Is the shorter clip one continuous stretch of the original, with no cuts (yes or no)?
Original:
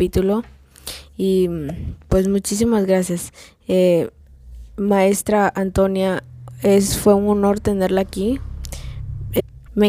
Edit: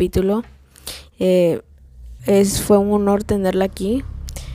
no